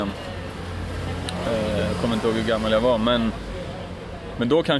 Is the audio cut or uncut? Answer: uncut